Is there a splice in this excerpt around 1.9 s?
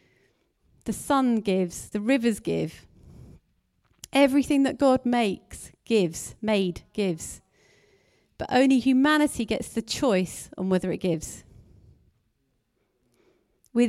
yes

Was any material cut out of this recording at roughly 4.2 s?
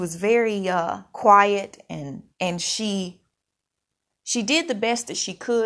no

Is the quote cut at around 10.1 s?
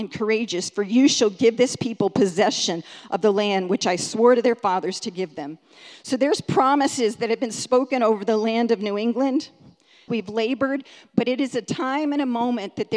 yes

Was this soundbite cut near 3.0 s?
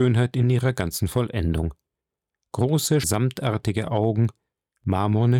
yes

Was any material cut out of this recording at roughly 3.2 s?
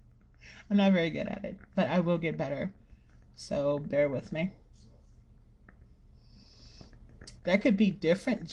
no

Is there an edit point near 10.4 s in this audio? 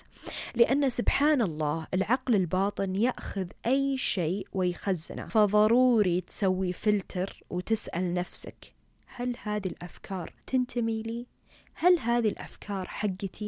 yes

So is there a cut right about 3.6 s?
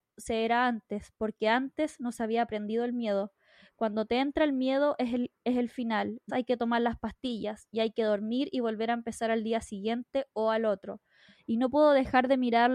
no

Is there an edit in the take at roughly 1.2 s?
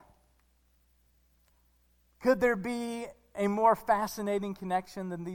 no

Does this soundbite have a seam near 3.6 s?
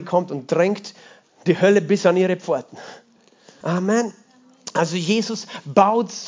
yes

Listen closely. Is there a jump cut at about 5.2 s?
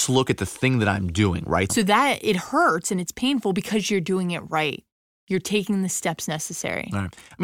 no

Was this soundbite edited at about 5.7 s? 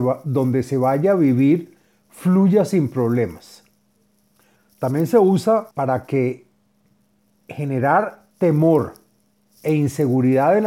yes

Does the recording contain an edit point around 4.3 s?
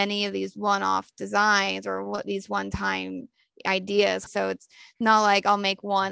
yes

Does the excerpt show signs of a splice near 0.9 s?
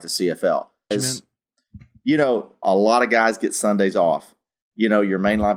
yes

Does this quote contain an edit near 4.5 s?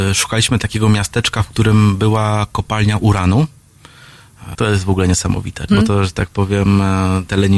yes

